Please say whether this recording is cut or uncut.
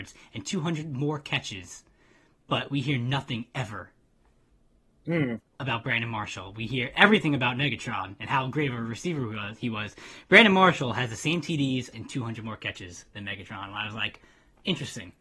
cut